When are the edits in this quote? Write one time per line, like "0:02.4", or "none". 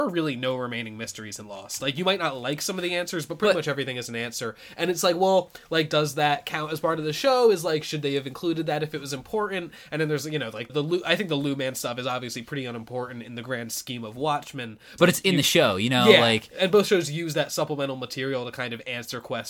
0:10.7
0:15.0